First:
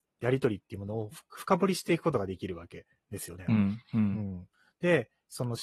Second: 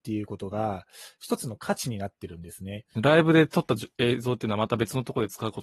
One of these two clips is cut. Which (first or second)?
second